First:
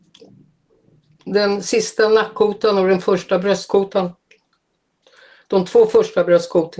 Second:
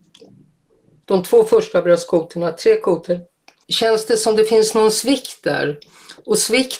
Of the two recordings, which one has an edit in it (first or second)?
second